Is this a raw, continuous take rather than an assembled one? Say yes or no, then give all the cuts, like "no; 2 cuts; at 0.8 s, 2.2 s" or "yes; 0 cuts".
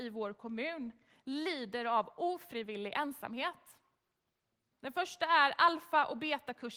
no; 1 cut; at 4.7 s